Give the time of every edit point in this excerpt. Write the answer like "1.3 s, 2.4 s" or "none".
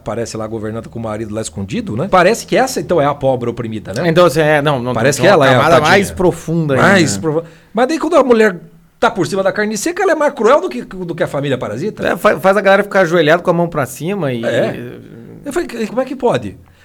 2.1 s, 15.9 s